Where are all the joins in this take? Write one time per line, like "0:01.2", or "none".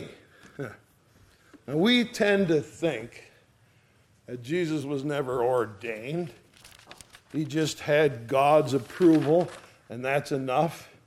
none